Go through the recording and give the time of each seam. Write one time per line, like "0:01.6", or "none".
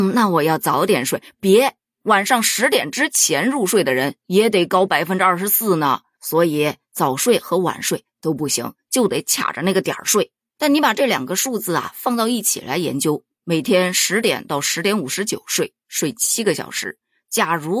none